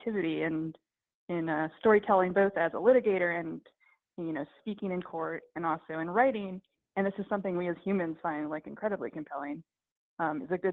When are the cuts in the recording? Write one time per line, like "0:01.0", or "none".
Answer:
none